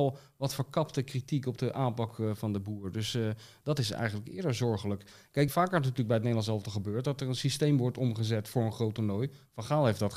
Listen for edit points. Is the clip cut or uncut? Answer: cut